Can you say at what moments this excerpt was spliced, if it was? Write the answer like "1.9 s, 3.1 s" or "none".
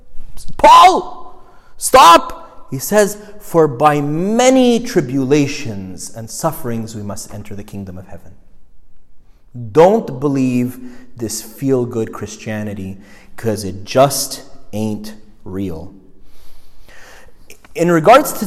none